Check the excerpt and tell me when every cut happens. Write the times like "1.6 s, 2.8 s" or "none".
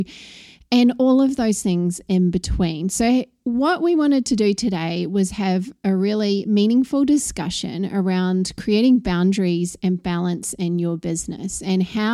none